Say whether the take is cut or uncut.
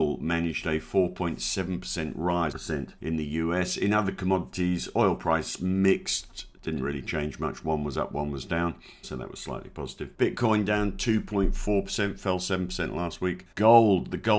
cut